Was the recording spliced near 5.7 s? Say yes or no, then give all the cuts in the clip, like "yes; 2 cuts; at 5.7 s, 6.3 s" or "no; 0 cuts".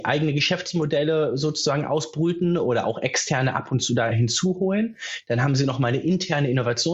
no; 1 cut; at 4.1 s